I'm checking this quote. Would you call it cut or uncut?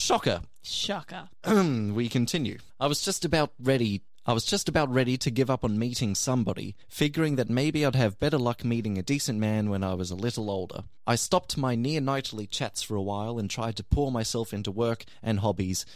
uncut